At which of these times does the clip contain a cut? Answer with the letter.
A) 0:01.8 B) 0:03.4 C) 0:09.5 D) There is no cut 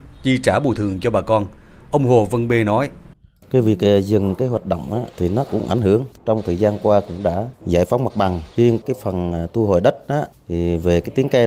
D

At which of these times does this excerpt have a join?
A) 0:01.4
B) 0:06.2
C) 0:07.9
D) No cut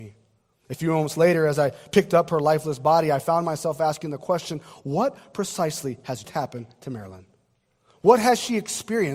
B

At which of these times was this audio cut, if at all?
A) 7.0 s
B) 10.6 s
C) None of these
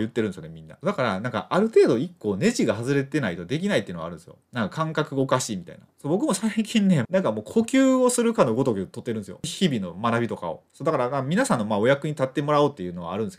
A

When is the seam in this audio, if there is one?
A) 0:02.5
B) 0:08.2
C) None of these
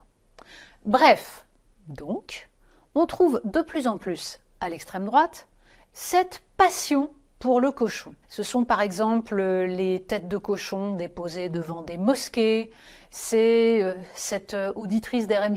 B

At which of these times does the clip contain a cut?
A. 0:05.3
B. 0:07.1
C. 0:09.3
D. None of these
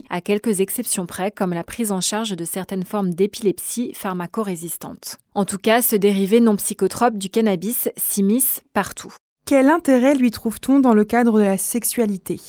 C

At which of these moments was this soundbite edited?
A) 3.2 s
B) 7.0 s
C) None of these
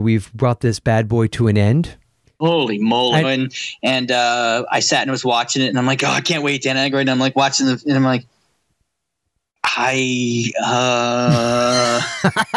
A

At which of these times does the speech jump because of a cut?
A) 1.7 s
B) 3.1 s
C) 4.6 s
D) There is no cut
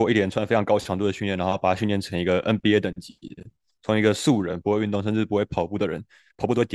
C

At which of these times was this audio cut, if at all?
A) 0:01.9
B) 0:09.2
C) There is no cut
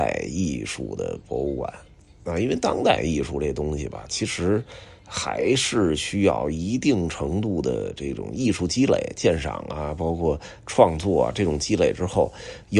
C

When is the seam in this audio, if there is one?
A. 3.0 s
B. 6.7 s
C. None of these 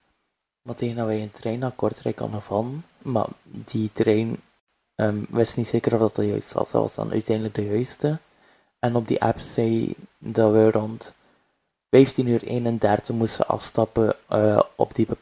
A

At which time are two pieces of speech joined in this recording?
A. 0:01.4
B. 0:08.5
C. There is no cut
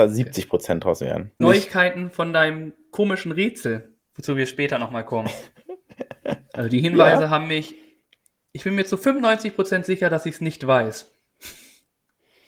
A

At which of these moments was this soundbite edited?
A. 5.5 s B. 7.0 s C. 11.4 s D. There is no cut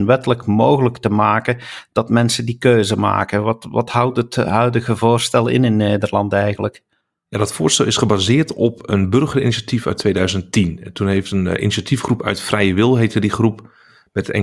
D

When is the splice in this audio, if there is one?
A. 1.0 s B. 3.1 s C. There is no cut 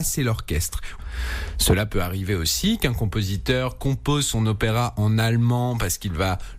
A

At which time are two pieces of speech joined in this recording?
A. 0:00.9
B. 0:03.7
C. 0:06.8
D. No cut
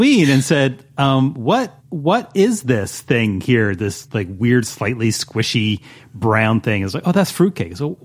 D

